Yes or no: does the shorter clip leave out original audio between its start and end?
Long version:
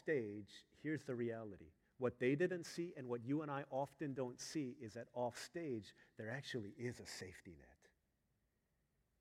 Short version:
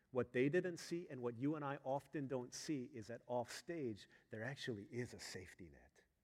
no